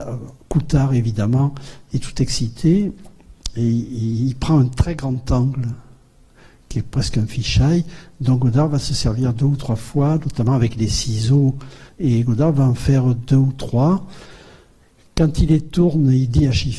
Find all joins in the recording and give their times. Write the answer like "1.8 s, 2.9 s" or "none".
11.9 s